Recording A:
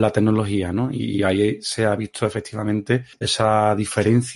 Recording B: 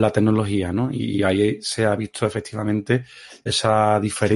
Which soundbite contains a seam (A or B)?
A